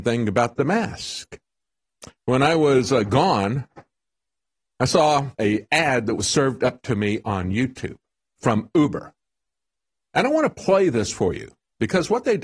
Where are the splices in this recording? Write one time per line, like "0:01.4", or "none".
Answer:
0:02.2
0:05.3